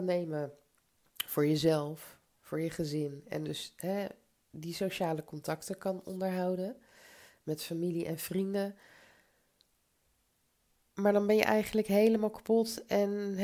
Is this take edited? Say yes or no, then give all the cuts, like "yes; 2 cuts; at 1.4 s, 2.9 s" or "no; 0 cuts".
no; 0 cuts